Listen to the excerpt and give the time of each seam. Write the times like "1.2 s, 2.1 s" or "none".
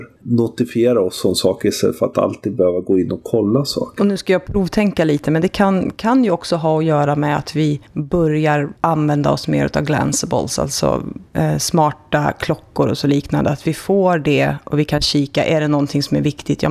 none